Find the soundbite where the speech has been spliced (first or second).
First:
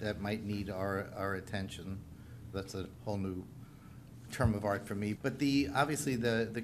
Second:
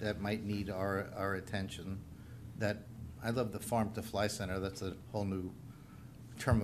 first